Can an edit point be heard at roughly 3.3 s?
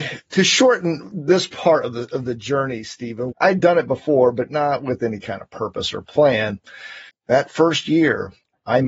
yes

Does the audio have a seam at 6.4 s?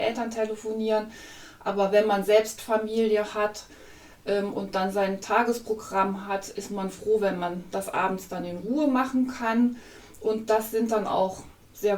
no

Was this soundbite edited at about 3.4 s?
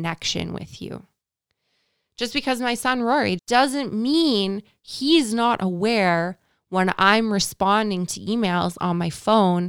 yes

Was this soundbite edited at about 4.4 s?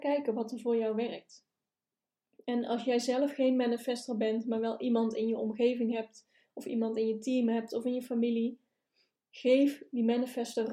no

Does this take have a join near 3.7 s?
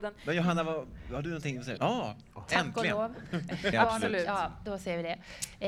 yes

